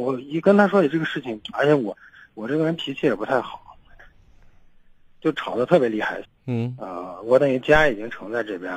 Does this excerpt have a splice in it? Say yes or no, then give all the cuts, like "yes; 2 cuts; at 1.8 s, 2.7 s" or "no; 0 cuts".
yes; 2 cuts; at 1.5 s, 6.2 s